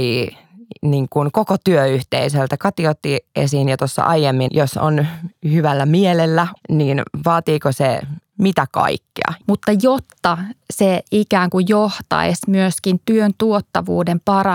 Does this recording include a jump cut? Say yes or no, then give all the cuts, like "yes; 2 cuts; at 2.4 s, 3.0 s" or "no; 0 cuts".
yes; 3 cuts; at 4.5 s, 6.6 s, 9.4 s